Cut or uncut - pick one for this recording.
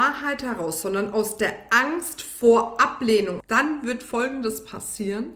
cut